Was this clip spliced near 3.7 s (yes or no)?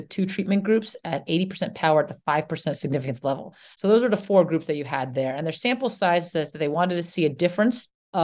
yes